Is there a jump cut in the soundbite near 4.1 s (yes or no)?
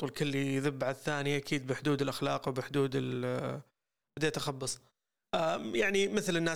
yes